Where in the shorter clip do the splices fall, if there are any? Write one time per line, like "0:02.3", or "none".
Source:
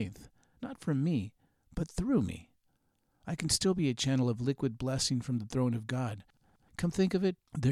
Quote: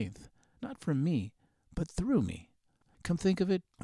0:02.8